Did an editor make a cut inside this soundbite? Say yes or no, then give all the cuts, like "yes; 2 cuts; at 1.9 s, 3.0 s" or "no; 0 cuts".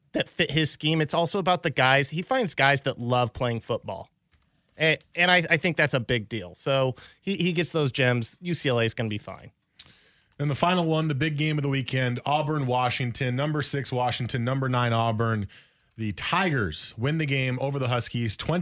no; 0 cuts